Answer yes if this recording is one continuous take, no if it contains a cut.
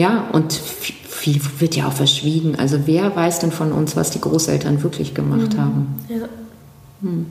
yes